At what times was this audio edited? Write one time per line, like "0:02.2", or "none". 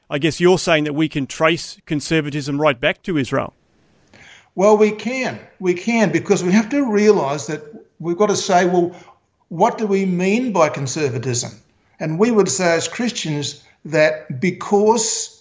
none